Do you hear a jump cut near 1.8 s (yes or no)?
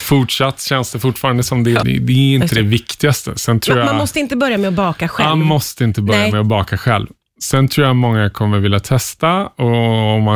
yes